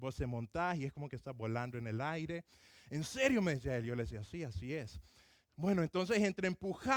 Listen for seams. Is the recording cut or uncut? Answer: uncut